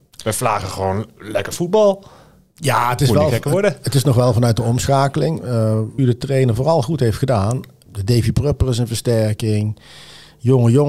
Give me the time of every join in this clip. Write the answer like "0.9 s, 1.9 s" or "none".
6.0 s, 7.9 s